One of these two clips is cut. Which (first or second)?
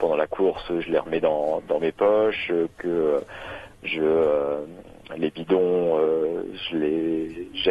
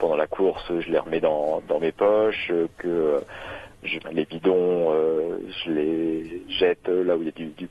second